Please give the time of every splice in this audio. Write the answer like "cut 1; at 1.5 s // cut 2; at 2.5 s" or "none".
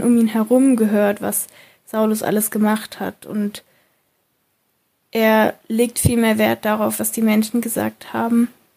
none